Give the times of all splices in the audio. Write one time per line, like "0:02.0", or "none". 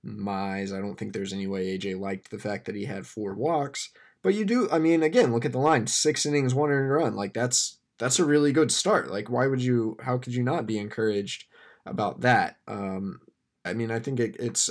0:13.7